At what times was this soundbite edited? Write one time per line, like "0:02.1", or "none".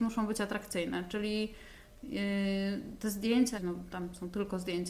0:03.5